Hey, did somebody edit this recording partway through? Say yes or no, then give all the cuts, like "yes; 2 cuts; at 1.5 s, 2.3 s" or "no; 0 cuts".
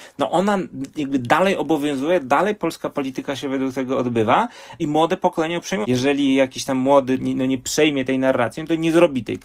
yes; 2 cuts; at 5.8 s, 7.2 s